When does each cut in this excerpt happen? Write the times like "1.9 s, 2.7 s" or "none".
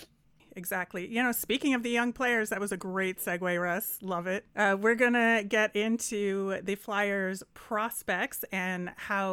4.5 s